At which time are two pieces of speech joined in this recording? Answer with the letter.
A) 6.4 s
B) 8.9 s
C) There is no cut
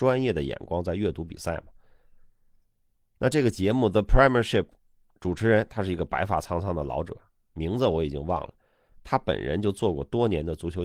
C